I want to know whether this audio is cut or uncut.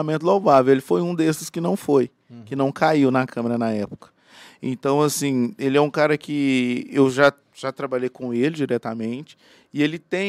uncut